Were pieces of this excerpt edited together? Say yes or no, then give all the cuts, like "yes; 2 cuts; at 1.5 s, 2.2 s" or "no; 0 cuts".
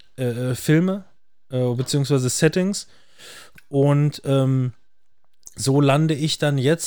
no; 0 cuts